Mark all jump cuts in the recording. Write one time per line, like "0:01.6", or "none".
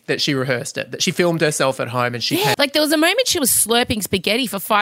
0:02.5